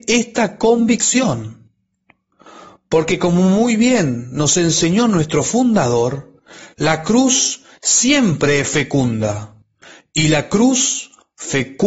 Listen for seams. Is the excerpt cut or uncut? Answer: uncut